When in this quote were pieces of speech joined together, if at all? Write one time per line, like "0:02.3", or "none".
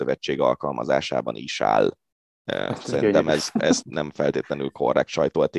0:03.8